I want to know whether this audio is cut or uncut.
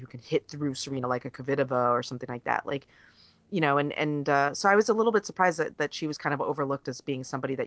uncut